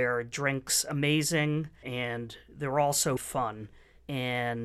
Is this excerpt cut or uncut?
cut